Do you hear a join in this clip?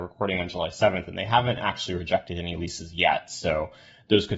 no; 0 cuts

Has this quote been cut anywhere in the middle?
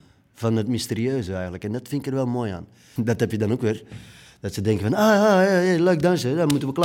yes; 1 cut; at 3.0 s

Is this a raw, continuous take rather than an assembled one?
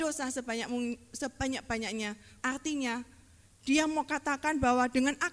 no; 1 cut; at 2.4 s

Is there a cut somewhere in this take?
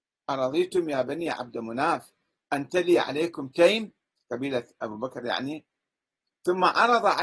no; 0 cuts

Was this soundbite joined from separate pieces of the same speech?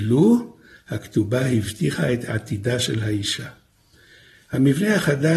no; 0 cuts

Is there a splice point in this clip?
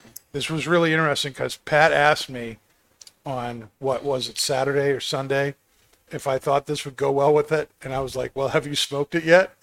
yes; 1 cut; at 6.1 s

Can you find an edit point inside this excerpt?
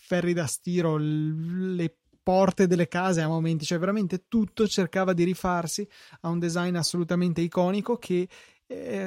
no; 0 cuts

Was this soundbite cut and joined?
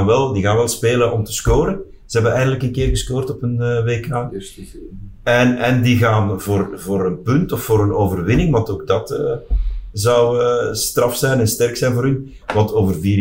no; 0 cuts

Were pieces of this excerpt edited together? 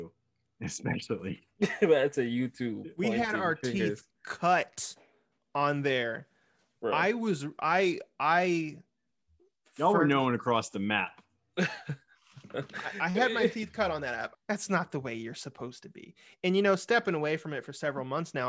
yes; 1 cut; at 14.3 s

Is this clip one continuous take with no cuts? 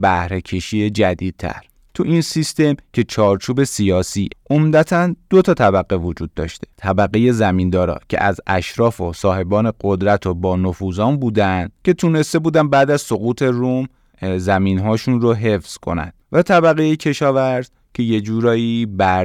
no; 2 cuts; at 4.3 s, 16.2 s

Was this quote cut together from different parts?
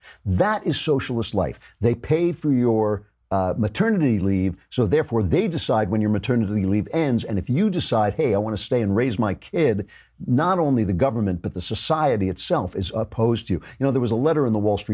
no; 0 cuts

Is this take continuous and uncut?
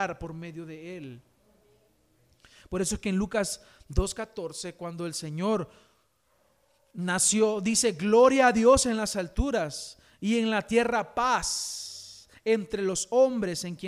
yes; 0 cuts

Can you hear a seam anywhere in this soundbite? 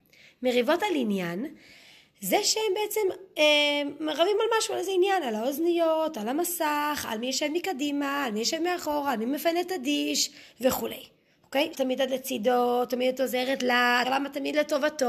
yes; 2 cuts; at 11.7 s, 14.0 s

